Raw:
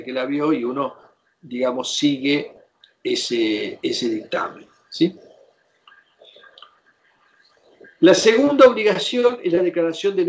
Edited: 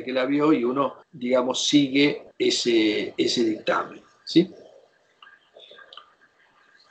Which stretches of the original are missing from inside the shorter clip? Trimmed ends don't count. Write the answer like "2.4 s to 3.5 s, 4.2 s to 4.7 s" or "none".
1.0 s to 1.3 s, 2.6 s to 3.0 s